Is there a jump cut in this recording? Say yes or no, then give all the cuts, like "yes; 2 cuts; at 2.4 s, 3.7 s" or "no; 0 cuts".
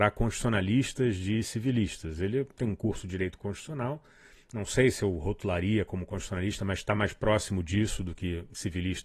no; 0 cuts